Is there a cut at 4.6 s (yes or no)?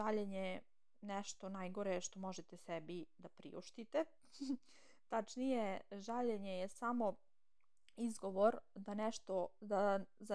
no